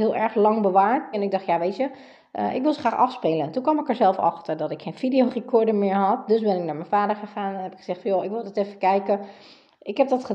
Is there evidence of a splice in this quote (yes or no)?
yes